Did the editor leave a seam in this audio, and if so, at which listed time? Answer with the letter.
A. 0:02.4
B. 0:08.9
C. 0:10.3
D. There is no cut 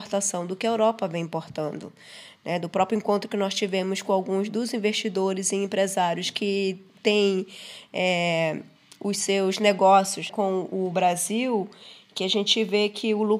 C